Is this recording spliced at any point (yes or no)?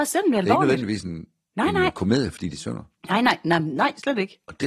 no